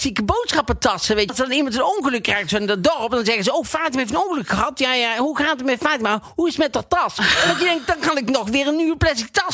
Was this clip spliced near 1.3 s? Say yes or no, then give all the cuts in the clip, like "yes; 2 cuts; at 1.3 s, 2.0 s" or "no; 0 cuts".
yes; 1 cut; at 1.3 s